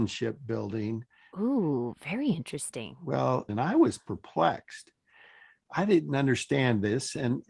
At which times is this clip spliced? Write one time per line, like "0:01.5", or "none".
0:01.3
0:03.5